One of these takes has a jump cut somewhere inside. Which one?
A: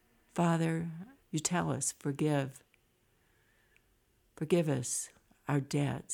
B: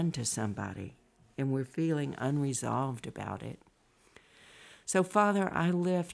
A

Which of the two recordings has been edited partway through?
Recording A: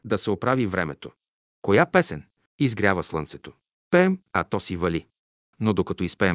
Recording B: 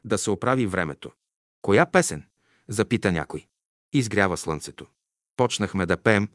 A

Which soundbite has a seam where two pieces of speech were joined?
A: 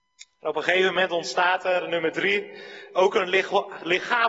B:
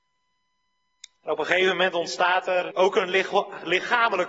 B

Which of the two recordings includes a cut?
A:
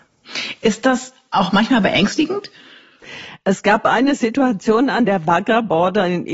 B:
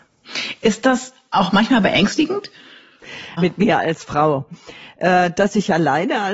B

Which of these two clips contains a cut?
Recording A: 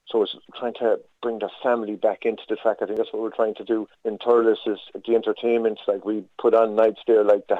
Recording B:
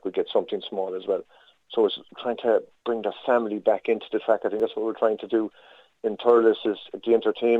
A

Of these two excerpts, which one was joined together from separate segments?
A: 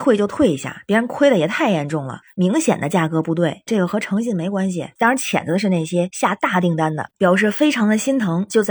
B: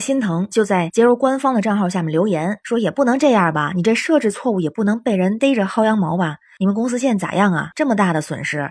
A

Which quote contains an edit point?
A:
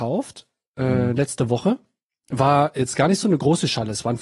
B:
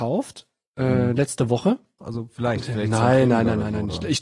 B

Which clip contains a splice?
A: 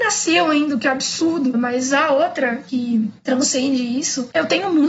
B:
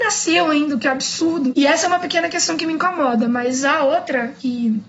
A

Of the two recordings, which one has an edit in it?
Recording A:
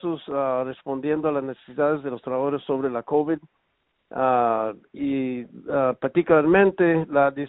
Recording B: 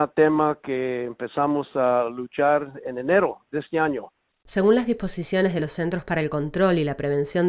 B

